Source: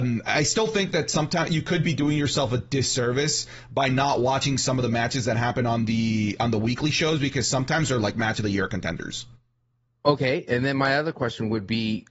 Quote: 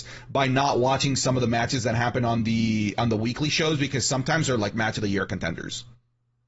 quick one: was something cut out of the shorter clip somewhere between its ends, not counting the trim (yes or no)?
no